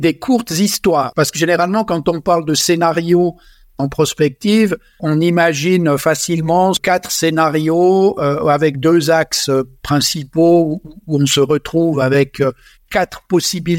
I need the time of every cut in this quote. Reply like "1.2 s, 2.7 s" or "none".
none